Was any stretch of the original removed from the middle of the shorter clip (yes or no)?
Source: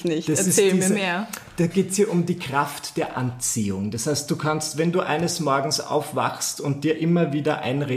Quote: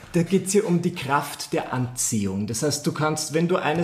no